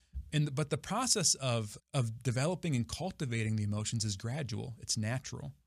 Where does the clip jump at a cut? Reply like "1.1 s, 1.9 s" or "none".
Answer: 1.8 s